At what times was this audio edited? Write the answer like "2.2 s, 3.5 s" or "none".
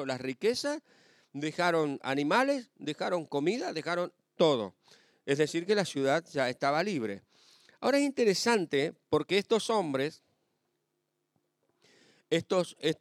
none